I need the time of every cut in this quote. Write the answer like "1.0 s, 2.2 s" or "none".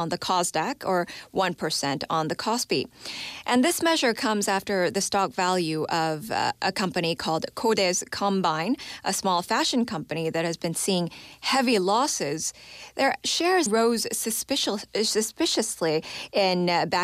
13.7 s